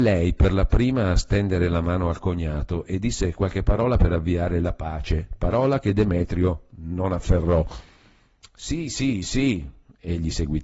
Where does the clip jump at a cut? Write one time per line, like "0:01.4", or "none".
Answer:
none